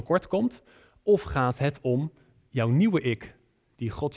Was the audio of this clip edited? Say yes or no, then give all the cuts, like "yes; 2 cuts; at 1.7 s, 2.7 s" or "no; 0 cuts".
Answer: no; 0 cuts